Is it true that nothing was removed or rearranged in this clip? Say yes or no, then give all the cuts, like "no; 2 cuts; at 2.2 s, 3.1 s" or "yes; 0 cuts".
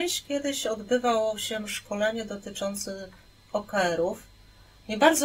yes; 0 cuts